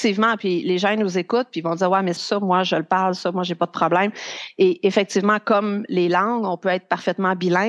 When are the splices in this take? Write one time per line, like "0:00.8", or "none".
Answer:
0:02.2

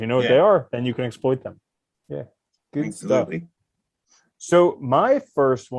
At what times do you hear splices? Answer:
none

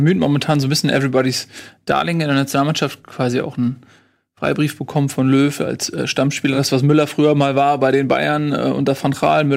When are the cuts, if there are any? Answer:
none

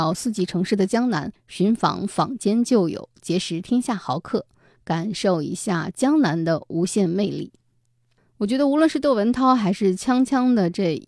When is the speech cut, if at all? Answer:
none

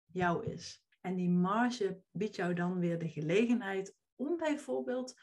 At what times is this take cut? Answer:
0:00.9

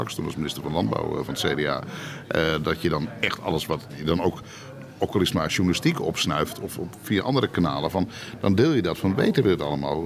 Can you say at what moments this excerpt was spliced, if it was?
none

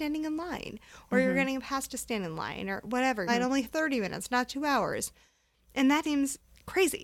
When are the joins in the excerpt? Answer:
0:03.3
0:06.0

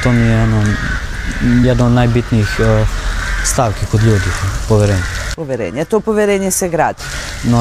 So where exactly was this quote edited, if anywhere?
none

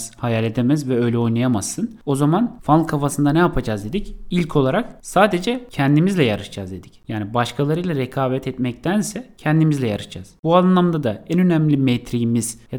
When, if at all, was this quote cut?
none

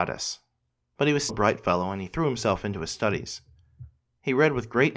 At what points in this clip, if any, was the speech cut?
0:01.3

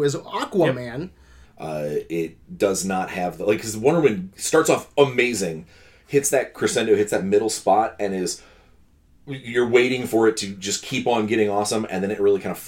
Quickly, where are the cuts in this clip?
0:01.4

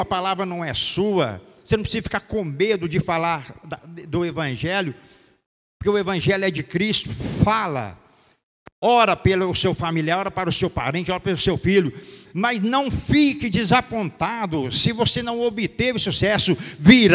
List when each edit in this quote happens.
none

